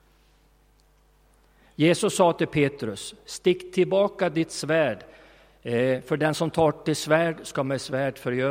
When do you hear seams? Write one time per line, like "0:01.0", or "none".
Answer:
none